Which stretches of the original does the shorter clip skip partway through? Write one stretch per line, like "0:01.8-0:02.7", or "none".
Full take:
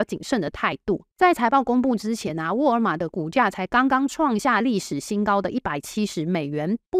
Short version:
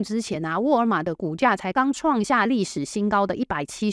0:03.7-0:03.9